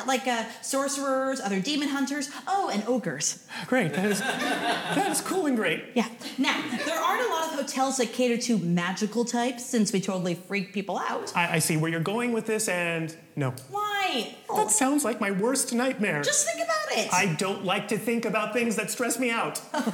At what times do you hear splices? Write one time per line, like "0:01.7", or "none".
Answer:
0:14.5